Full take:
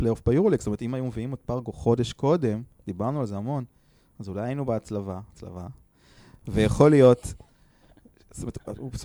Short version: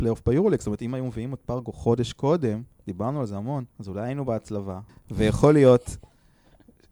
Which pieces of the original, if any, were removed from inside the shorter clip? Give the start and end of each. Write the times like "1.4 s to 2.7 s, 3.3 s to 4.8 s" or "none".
3.7 s to 4.1 s, 5.3 s to 6.3 s